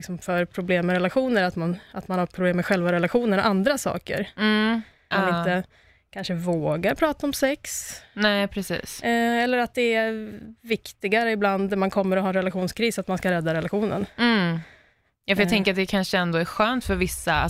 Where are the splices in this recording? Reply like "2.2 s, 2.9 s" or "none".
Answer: 5.1 s